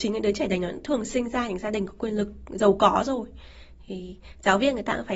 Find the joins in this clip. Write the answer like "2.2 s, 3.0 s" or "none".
none